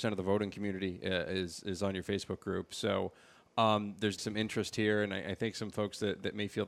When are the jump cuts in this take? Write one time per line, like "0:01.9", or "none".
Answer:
0:04.2